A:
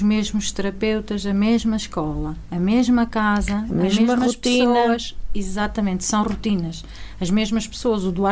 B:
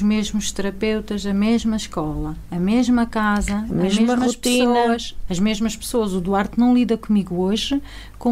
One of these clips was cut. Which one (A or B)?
B